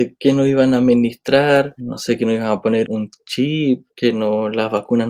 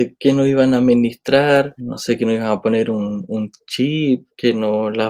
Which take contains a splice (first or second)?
first